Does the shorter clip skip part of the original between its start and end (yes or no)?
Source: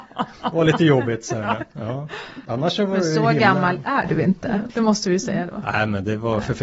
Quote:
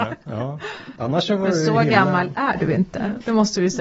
no